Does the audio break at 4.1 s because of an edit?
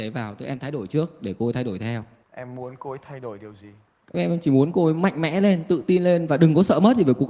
yes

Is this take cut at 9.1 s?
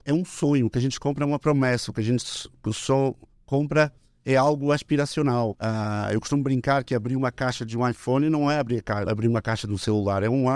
yes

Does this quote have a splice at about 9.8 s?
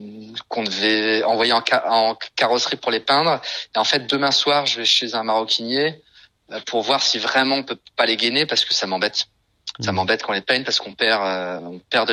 no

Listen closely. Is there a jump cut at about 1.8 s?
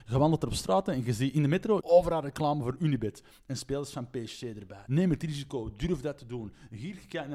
yes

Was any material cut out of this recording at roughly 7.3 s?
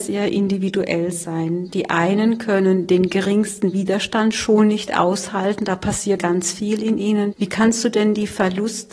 yes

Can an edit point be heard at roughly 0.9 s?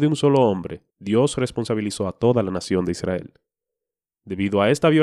yes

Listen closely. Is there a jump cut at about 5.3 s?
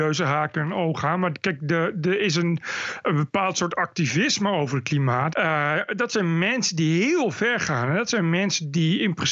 yes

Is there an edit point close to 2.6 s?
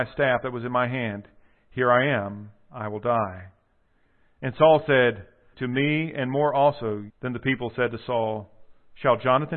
no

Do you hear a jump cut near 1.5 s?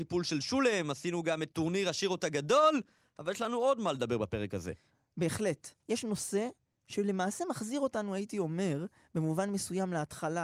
yes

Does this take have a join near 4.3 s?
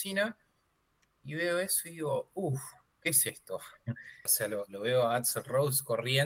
yes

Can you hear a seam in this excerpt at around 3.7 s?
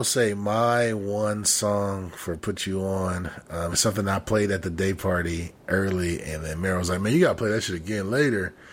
no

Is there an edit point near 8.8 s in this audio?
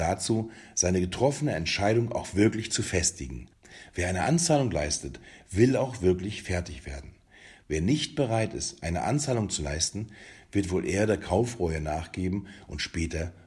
no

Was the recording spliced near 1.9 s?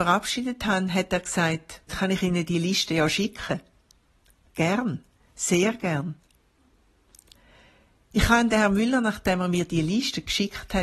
yes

